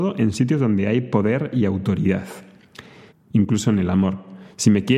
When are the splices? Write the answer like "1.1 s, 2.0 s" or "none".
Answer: 3.1 s